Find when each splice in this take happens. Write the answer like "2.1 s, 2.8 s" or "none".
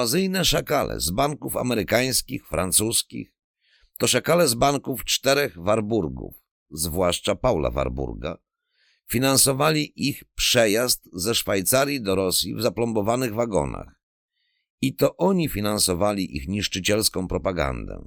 none